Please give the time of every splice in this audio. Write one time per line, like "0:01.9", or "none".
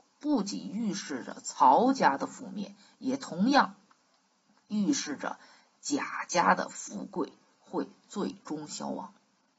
none